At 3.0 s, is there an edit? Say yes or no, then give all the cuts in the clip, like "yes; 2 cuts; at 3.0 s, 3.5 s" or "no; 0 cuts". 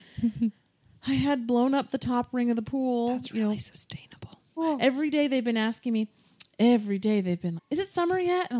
no; 2 cuts; at 4.6 s, 7.6 s